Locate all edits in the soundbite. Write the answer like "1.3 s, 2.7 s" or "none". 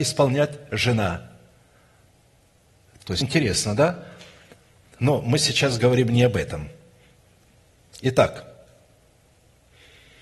3.2 s